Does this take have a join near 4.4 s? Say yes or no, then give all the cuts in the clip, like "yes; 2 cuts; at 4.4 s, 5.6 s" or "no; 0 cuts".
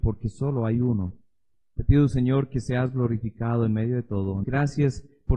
yes; 1 cut; at 4.4 s